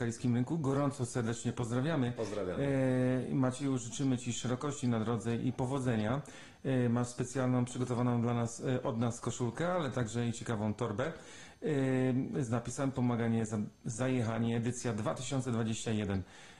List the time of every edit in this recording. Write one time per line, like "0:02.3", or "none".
none